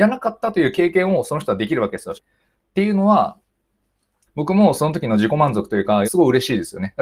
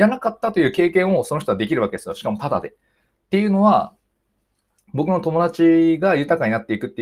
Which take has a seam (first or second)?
first